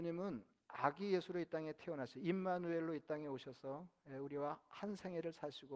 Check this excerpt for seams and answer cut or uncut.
uncut